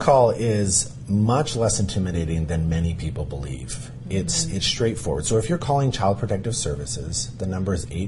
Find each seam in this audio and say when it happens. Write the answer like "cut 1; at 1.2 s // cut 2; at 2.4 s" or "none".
none